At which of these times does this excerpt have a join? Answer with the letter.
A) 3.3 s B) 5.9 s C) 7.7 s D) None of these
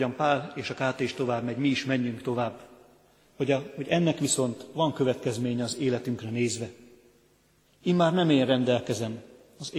C